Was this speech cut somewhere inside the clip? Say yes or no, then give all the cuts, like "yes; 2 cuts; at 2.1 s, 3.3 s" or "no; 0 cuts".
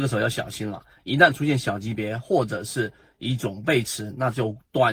no; 0 cuts